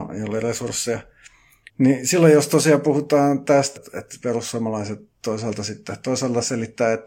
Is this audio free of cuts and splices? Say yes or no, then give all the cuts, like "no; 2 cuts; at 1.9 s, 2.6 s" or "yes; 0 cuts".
no; 2 cuts; at 1.7 s, 3.8 s